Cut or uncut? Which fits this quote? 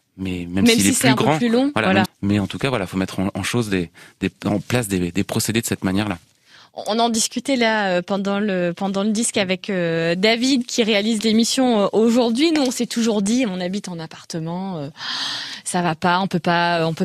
cut